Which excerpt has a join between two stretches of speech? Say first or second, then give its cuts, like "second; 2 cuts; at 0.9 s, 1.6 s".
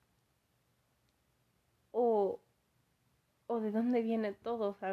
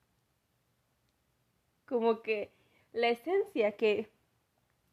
second; 1 cut; at 1.7 s